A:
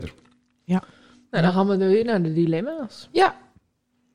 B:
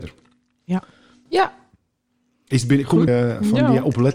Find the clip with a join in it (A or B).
B